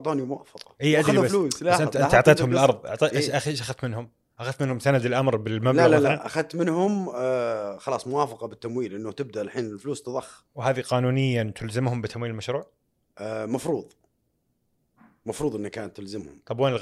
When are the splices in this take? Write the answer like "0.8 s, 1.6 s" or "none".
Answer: none